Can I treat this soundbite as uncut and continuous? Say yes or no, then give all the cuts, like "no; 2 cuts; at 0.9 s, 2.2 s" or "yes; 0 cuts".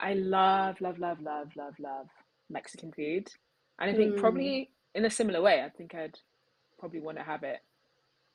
no; 1 cut; at 1.2 s